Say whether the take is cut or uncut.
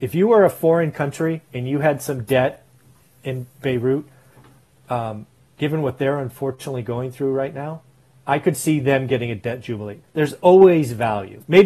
cut